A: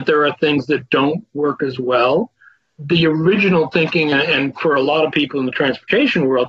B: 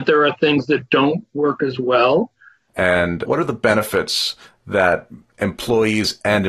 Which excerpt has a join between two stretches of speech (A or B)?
B